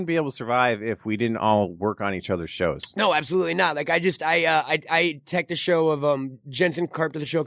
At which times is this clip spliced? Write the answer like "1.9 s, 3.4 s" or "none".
none